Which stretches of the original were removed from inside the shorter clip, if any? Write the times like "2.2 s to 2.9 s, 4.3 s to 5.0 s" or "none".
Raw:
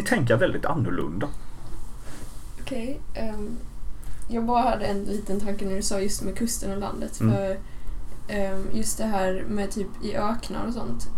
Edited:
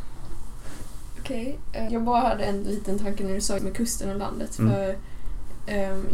3.3 s to 4.3 s, 6.0 s to 6.2 s